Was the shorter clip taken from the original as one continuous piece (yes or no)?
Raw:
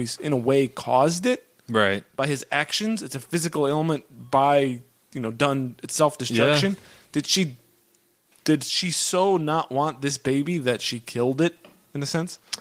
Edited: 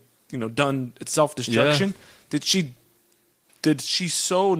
yes